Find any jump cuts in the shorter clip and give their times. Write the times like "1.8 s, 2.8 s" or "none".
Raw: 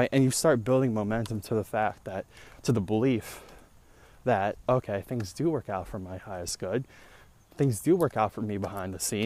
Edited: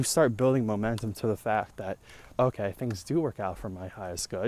2.3 s